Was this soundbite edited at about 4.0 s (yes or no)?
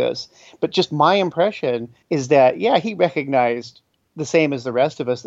no